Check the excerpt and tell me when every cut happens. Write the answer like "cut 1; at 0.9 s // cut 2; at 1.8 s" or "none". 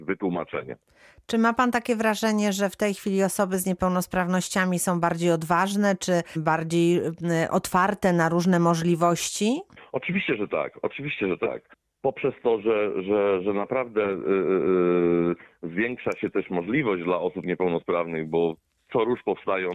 none